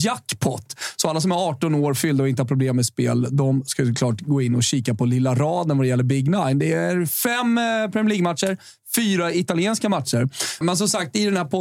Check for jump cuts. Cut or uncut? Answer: cut